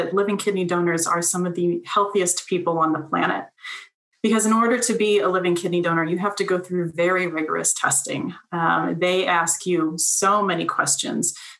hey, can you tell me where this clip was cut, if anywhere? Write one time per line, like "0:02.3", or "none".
none